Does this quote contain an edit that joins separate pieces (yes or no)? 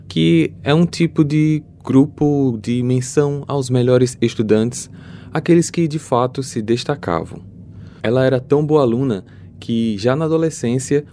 yes